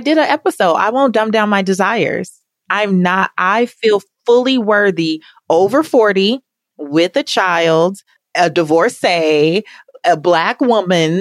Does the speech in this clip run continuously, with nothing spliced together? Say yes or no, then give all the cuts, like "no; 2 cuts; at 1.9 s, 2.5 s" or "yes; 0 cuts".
yes; 0 cuts